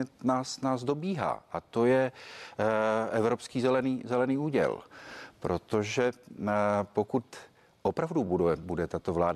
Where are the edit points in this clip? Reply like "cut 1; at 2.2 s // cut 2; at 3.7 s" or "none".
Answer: none